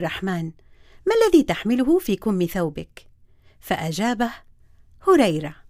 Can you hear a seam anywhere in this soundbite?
no; 0 cuts

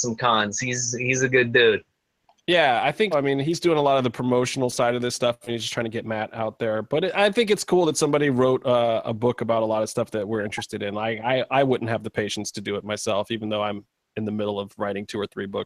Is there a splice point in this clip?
yes; 1 cut; at 3.1 s

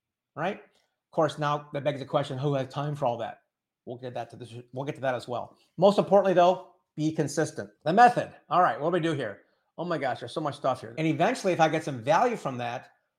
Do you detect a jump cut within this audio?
yes; 2 cuts; at 7.7 s, 10.9 s

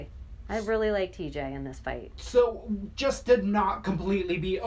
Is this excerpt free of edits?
yes; 0 cuts

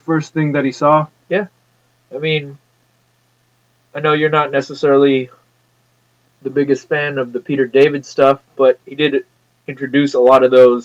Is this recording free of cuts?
yes; 0 cuts

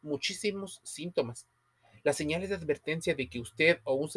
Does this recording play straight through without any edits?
yes; 0 cuts

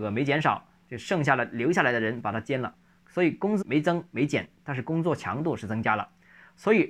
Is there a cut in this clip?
yes; 1 cut; at 3.6 s

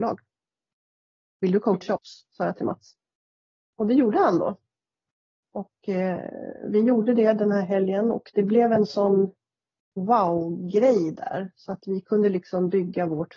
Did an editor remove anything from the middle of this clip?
no; 0 cuts

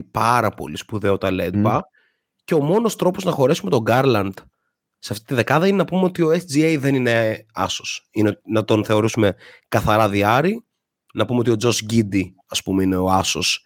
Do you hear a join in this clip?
yes; 1 cut; at 1.5 s

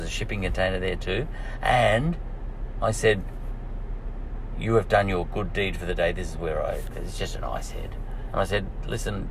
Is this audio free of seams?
no; 2 cuts; at 6.9 s, 8.3 s

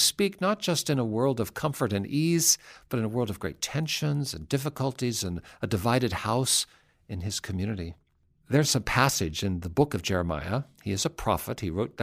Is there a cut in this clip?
no; 0 cuts

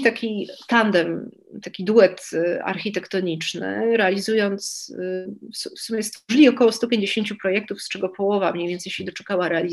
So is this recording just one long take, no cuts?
no; 1 cut; at 1.6 s

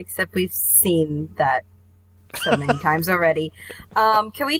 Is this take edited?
no; 0 cuts

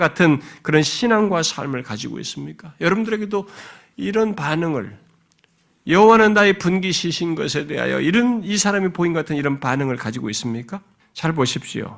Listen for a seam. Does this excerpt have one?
yes; 1 cut; at 11.0 s

